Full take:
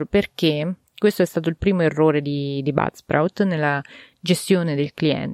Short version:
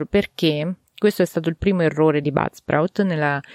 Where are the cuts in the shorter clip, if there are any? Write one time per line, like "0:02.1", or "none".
0:02.2

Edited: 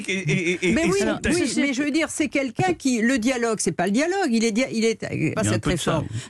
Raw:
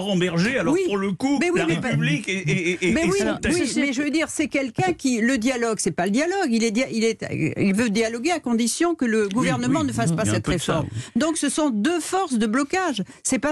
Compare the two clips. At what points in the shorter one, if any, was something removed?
0:05.4

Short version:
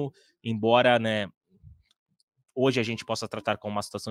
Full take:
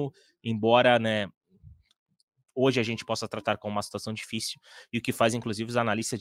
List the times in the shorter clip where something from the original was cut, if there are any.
none

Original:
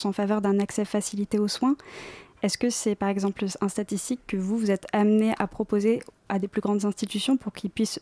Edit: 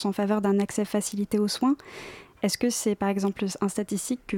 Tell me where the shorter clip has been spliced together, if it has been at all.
none

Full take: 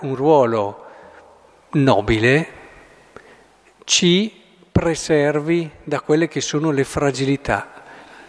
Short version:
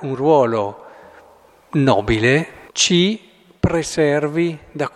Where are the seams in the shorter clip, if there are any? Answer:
0:02.7

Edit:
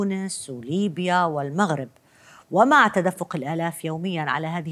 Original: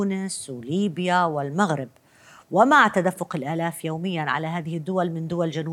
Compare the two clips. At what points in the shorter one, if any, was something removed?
none

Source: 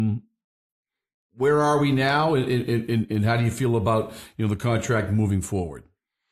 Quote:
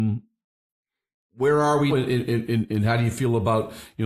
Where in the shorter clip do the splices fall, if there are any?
0:01.9

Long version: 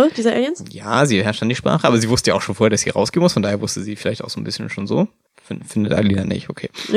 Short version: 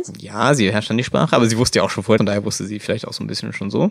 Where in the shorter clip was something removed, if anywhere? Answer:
0:02.2

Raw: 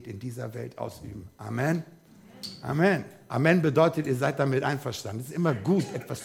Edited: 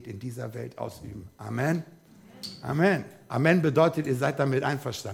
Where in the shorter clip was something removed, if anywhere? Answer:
none

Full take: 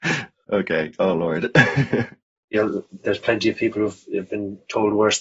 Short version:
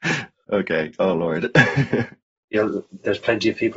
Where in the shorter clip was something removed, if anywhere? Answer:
none

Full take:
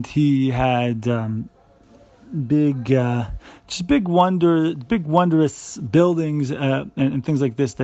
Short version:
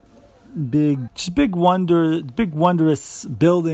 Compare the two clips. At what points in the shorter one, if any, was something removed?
0:01.1

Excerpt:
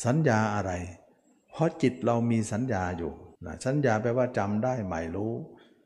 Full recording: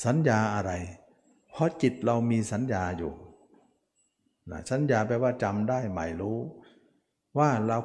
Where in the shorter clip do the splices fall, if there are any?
0:03.4

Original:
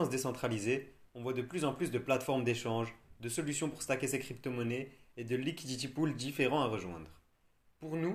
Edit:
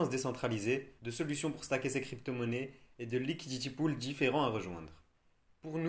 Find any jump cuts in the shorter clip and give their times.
0:01.0

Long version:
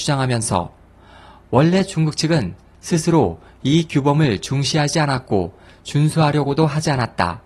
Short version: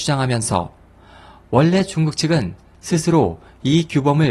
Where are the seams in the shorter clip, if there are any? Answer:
none

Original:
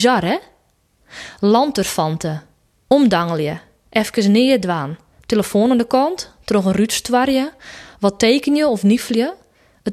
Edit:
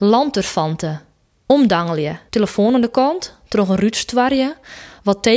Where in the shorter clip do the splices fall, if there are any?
0:02.3

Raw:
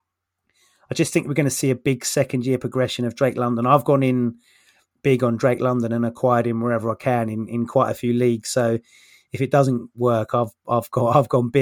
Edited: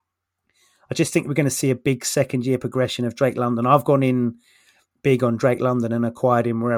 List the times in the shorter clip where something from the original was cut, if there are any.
none

